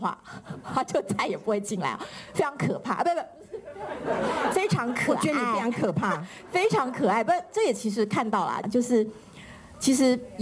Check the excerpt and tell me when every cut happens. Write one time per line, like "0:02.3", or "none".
0:08.6